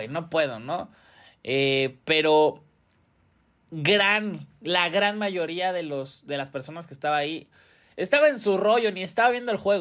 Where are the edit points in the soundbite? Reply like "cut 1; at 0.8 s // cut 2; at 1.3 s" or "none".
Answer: none